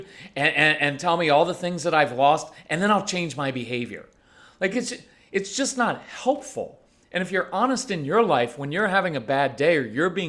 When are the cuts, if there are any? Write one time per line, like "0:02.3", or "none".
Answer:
none